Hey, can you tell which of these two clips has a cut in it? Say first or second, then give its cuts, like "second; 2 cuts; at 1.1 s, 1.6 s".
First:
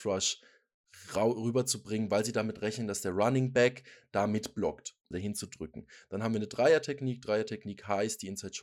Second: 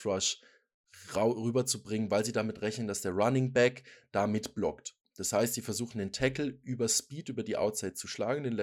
first; 1 cut; at 5.1 s